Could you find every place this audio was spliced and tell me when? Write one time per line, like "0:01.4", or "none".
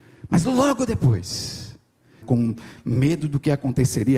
0:02.2